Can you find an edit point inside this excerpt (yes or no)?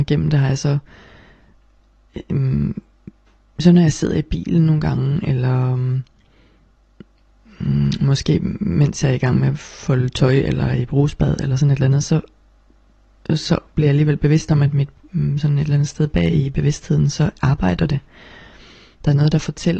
no